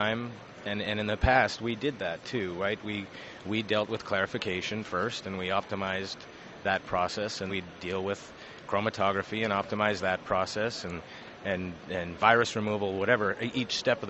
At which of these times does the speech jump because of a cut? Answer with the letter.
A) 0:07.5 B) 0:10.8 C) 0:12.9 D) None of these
A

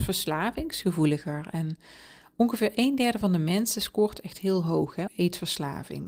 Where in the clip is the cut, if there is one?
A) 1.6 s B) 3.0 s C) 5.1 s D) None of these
C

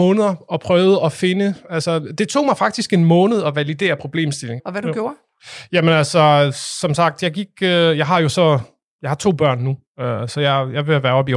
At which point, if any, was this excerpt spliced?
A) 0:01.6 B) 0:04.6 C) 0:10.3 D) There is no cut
B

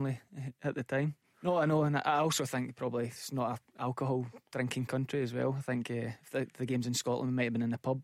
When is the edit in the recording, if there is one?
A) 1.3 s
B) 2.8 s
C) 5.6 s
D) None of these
A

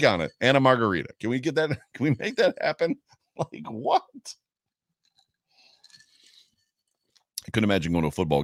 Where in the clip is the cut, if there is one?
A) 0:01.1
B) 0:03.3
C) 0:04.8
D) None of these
D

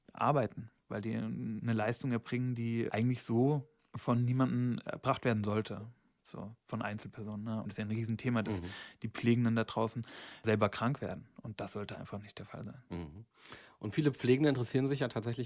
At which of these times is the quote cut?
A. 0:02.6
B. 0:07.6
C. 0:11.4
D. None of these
B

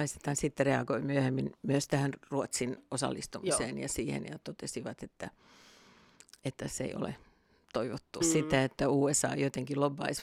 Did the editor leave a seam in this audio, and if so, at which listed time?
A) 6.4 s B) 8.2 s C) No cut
B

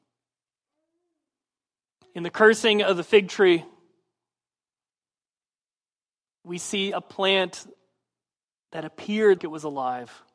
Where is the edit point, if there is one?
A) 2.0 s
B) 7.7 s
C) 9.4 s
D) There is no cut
C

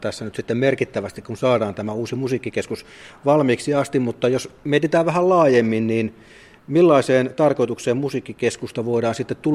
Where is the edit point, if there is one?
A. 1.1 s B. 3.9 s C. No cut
C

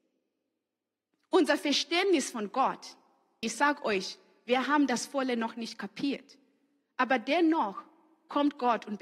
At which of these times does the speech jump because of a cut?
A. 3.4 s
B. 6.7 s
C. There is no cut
A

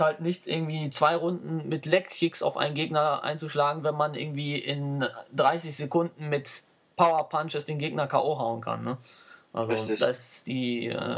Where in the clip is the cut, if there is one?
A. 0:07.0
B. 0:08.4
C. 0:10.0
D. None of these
D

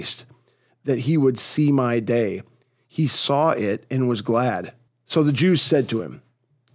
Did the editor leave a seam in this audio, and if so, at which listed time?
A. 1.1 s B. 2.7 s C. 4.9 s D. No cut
C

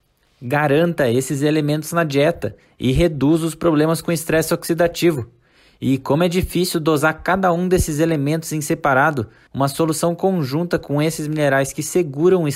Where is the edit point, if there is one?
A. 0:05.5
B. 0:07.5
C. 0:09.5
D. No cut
C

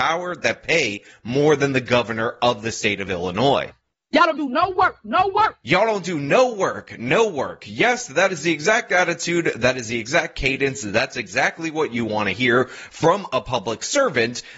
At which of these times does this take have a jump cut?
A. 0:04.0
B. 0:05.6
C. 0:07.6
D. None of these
D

